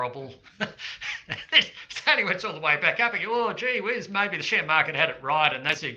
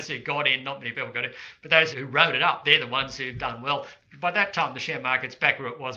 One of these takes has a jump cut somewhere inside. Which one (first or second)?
second